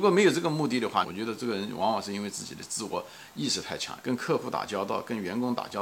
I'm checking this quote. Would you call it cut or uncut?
cut